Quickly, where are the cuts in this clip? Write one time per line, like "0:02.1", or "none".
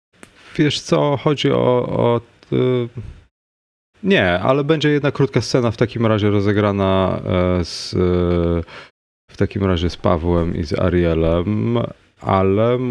none